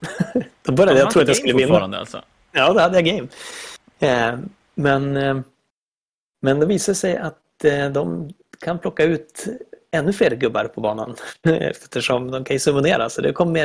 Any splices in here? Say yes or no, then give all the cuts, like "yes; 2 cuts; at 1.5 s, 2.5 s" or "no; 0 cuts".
no; 0 cuts